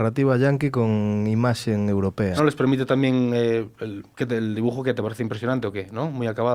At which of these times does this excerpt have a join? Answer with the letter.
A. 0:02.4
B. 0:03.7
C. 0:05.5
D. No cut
A